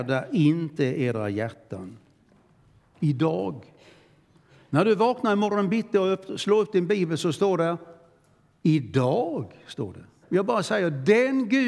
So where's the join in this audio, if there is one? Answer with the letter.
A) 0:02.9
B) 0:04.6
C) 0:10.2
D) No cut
C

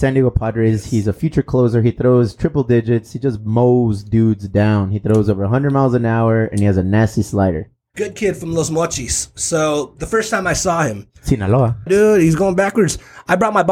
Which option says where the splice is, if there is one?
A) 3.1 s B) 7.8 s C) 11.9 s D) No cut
C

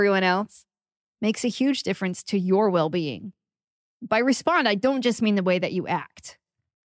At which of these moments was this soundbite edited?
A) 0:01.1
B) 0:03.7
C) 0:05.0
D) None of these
D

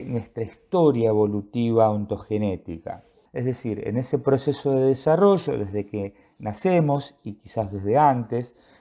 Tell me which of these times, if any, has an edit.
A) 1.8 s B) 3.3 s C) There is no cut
B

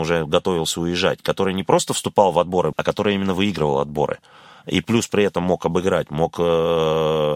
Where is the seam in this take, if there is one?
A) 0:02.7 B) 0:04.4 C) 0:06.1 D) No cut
A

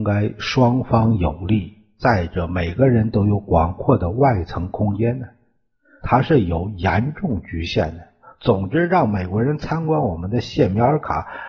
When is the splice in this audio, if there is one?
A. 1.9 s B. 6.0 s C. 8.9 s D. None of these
B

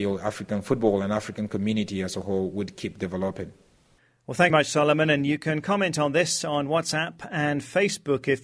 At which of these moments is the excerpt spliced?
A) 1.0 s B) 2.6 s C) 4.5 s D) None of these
C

